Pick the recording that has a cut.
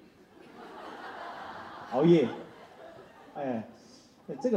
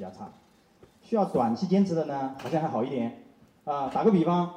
first; 1 cut; at 3.4 s

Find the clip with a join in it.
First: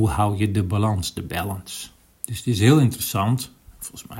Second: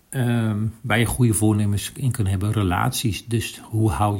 first; 1 cut; at 2.1 s

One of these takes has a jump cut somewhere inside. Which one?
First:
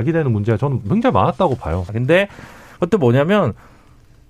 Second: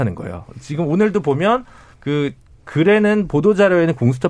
first; 1 cut; at 1.9 s

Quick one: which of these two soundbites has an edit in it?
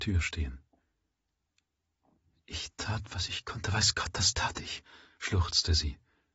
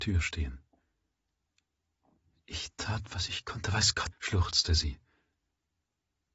second; 1 cut; at 4.1 s

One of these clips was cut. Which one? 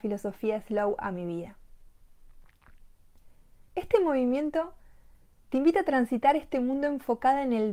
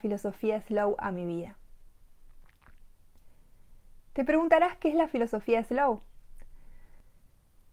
first; 1 cut; at 3.7 s

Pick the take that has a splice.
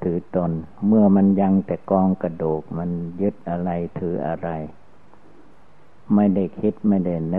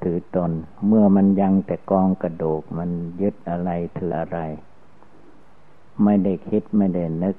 second; 1 cut; at 4.1 s

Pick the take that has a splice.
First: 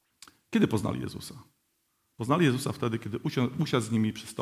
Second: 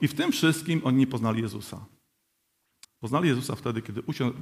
second; 1 cut; at 2.8 s

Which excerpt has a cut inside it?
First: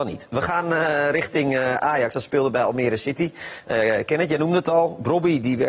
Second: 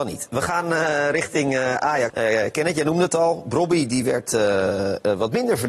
second; 1 cut; at 2.1 s

